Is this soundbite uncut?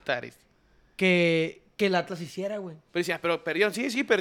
no; 1 cut; at 2.9 s

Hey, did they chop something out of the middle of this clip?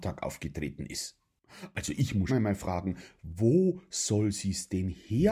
yes; 1 cut; at 2.3 s

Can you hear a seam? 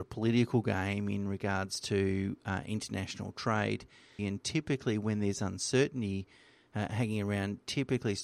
yes; 1 cut; at 4.2 s

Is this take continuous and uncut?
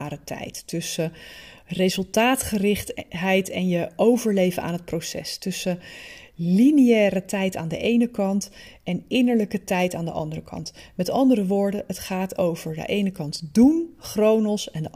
yes; 0 cuts

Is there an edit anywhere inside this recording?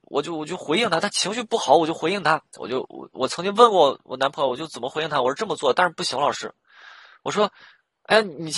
no; 0 cuts

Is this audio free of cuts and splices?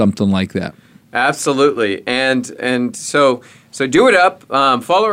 yes; 0 cuts

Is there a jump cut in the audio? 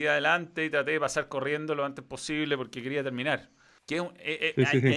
yes; 1 cut; at 3.8 s

